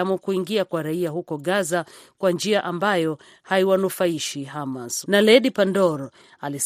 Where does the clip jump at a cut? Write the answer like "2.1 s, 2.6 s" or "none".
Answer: 5.0 s